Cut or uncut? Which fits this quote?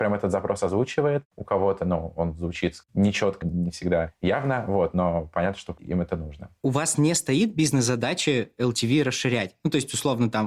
cut